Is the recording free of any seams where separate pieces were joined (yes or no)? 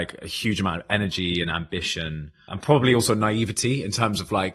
no